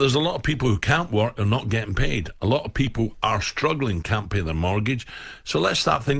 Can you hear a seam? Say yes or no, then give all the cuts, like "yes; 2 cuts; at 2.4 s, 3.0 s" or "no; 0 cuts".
yes; 1 cut; at 4.0 s